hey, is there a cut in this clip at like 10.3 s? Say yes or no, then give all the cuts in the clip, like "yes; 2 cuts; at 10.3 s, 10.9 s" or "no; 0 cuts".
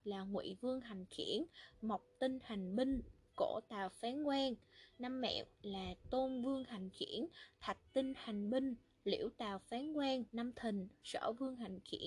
yes; 1 cut; at 10.3 s